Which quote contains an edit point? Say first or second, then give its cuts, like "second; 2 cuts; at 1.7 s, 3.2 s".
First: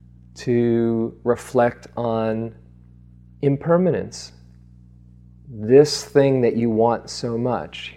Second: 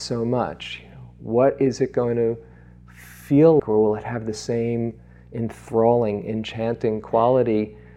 second; 1 cut; at 3.6 s